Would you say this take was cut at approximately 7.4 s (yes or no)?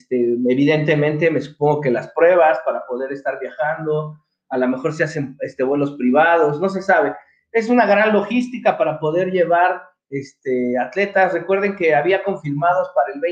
no